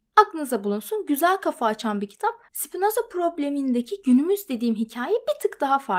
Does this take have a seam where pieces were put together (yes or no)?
yes